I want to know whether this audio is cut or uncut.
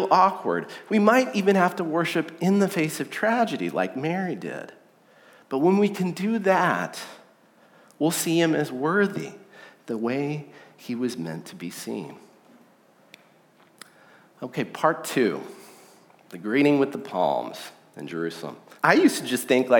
cut